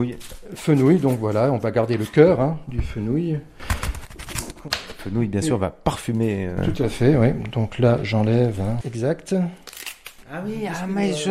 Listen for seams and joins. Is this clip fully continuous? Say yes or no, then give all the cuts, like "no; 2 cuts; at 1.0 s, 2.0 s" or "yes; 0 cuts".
no; 2 cuts; at 8.8 s, 10.2 s